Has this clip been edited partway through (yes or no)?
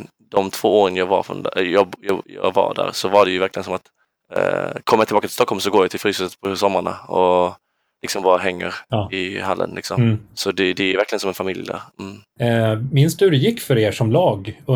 no